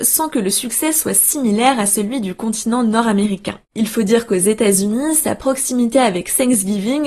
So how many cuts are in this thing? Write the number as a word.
zero